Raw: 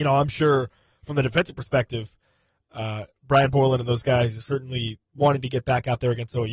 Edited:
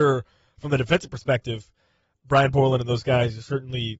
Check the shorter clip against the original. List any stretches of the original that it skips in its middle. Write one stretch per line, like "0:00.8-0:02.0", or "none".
0:02.6-0:03.2